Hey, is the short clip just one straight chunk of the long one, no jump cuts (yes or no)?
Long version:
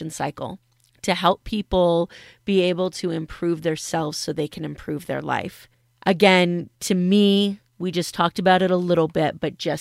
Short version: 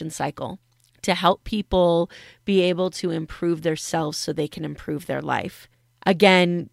yes